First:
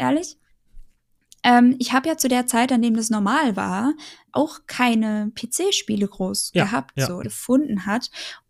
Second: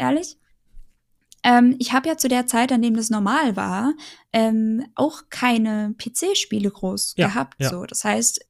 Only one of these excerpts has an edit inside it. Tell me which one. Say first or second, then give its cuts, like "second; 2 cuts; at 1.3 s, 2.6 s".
first; 2 cuts; at 4.3 s, 7.2 s